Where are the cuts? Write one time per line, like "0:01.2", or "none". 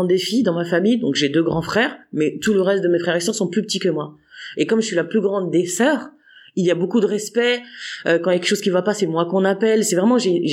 none